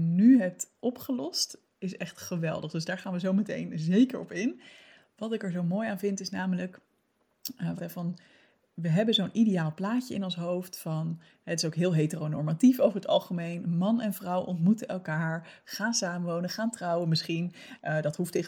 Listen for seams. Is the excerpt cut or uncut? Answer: cut